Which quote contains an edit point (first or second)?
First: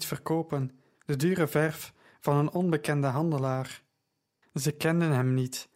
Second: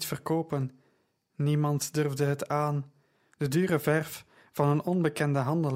first